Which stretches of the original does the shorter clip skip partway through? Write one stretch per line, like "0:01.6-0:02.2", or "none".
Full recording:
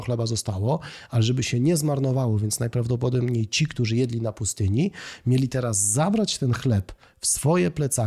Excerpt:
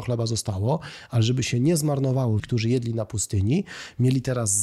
0:02.4-0:03.7

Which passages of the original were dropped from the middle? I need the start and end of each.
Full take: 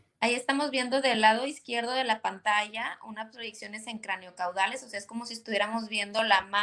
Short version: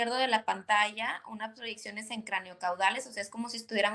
none

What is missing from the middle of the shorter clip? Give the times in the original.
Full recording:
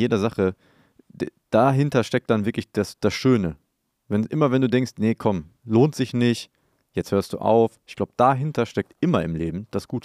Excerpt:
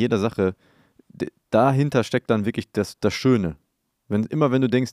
none

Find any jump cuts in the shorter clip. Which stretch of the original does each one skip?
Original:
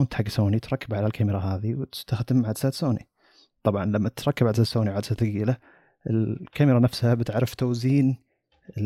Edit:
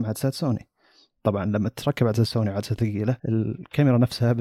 0:05.6-0:06.0

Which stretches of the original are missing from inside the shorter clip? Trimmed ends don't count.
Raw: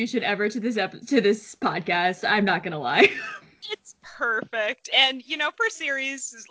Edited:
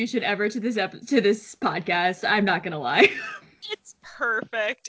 none

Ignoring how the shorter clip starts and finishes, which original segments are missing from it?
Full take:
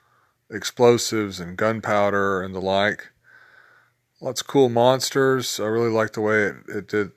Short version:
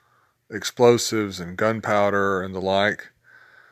none

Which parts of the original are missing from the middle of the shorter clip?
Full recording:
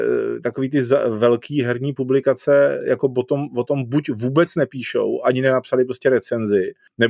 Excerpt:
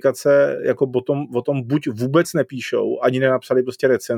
none

